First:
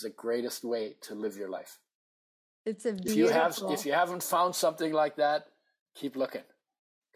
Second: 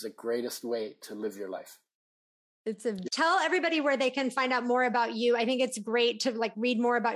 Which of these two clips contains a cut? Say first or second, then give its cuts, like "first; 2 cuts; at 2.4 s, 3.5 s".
second; 1 cut; at 3.1 s